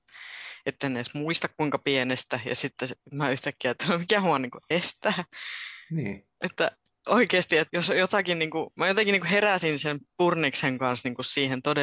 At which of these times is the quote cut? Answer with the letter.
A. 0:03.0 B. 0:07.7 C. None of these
B